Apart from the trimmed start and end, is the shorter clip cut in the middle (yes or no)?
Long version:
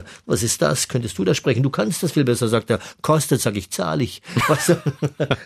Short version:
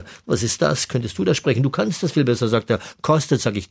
no